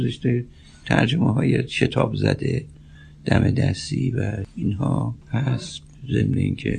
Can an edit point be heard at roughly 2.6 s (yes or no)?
no